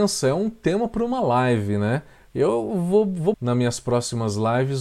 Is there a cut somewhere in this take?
yes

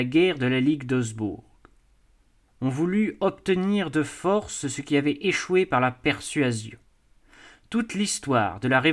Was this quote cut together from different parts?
no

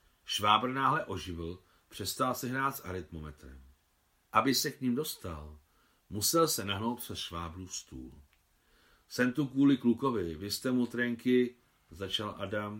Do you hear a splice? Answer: yes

